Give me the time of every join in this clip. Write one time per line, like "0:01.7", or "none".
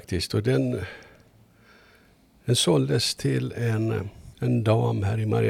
0:04.3